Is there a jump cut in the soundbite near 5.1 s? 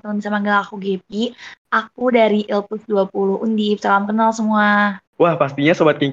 yes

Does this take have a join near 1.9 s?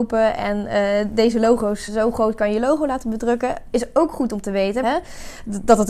yes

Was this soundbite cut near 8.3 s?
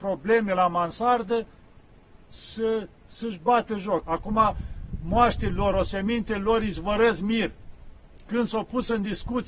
no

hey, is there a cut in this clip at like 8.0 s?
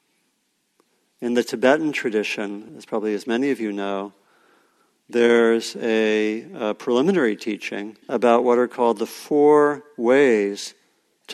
yes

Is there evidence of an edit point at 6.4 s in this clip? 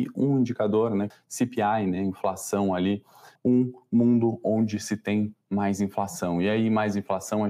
no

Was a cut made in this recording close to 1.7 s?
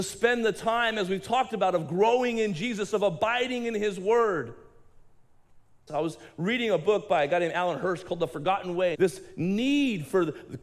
no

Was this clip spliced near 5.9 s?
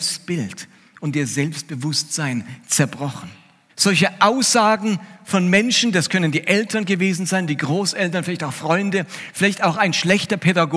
no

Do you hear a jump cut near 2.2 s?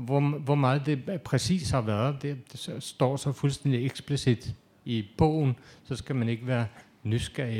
no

